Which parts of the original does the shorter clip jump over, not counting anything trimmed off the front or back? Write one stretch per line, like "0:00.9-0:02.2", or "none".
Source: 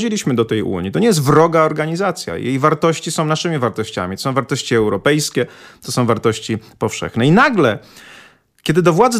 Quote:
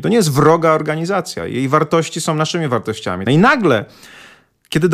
0:04.2-0:07.2